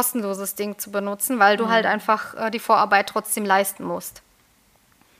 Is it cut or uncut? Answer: uncut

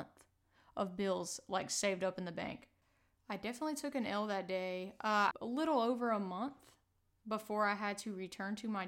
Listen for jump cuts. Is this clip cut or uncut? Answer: cut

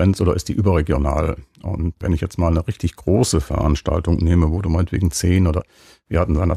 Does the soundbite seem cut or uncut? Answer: cut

